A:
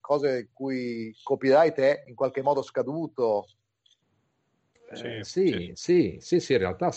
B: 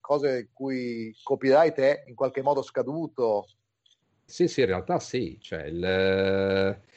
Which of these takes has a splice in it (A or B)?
B